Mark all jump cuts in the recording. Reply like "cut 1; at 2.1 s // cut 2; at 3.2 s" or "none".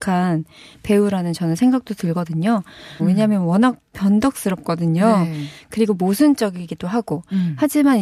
cut 1; at 3.0 s